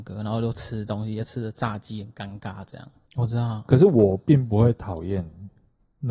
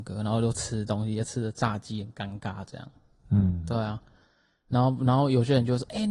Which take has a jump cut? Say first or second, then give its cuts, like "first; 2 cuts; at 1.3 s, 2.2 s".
first; 1 cut; at 3.1 s